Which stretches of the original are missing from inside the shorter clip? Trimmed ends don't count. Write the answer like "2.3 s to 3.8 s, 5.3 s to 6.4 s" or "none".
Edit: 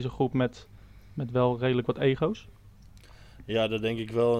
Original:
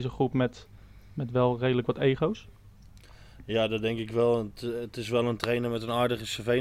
none